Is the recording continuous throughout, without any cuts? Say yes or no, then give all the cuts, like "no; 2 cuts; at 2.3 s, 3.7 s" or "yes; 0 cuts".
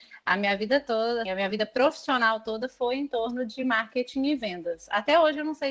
no; 1 cut; at 1.3 s